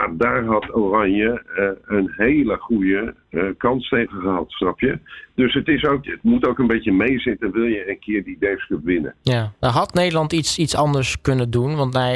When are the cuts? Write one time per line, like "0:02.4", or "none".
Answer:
0:06.0
0:09.2